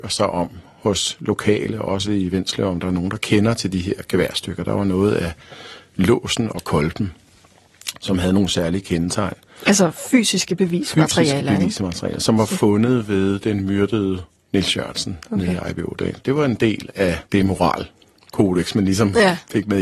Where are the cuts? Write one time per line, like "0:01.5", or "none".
0:16.2
0:17.3